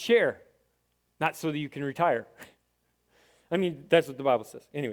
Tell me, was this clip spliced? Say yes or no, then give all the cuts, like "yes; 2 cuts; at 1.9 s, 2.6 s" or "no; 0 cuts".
no; 0 cuts